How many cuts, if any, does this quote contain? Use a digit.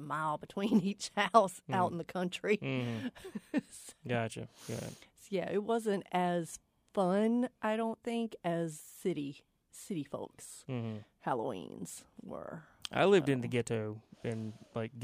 0